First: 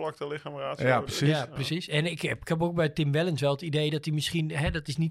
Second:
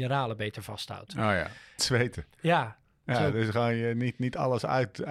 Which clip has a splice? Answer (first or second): second